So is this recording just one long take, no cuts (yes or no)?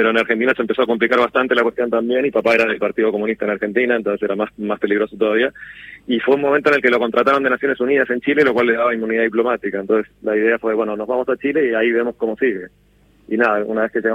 yes